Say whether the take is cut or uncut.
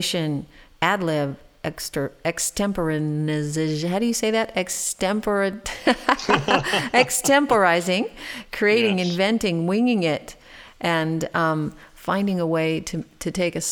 uncut